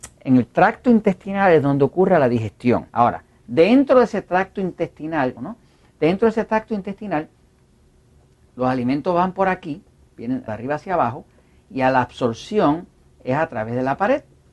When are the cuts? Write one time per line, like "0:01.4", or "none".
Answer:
0:02.9
0:05.4
0:10.5